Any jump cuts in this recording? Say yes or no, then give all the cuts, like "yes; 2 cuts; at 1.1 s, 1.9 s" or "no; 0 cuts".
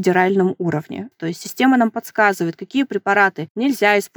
yes; 1 cut; at 1.1 s